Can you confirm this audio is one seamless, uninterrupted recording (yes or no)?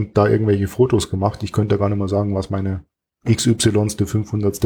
yes